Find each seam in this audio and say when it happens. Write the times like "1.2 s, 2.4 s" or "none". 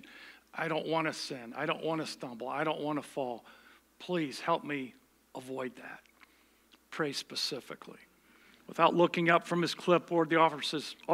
8.5 s